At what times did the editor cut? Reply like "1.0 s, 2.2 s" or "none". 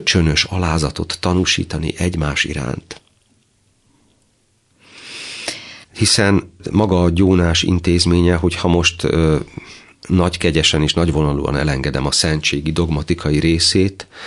5.8 s